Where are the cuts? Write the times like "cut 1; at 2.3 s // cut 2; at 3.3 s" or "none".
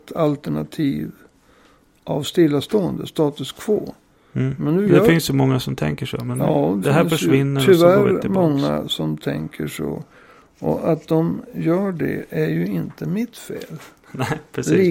cut 1; at 6.8 s

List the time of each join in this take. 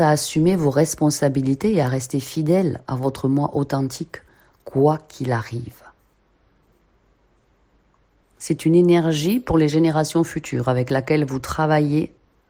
cut 1; at 8.2 s

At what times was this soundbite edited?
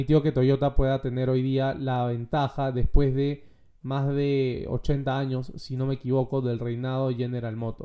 none

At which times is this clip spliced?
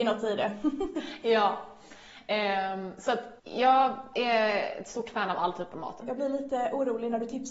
cut 1; at 3.4 s // cut 2; at 6.0 s

